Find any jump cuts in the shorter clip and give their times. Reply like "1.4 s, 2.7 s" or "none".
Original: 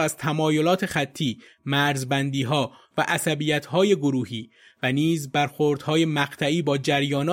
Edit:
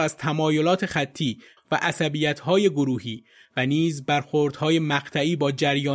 1.6 s